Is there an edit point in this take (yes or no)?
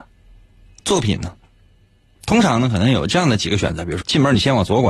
yes